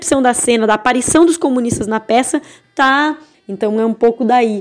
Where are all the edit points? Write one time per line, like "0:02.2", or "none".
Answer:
0:03.3